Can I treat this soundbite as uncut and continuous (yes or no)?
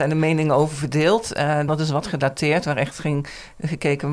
no